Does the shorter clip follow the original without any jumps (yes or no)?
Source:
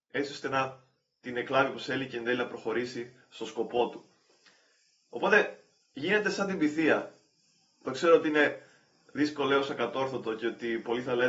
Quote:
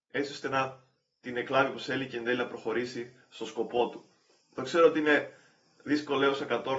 no